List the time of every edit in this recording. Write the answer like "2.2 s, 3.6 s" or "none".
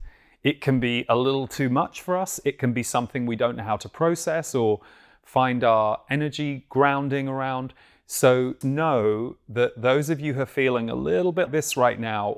8.6 s, 11.5 s